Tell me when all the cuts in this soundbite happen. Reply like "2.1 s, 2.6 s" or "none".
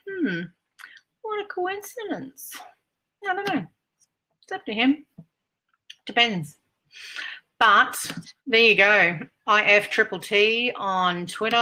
3.1 s, 8.4 s